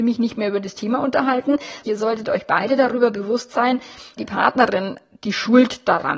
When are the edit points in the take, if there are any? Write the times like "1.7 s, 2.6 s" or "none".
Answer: 1.8 s, 4.2 s